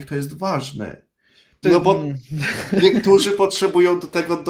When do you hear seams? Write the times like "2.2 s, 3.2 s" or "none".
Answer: 1.6 s